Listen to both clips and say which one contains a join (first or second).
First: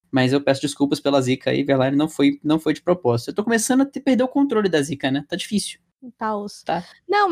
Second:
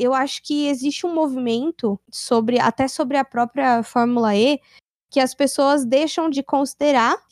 second